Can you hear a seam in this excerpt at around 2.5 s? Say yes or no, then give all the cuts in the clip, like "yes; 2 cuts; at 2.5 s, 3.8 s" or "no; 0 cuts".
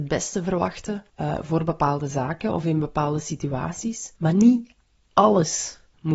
no; 2 cuts; at 1.1 s, 4.2 s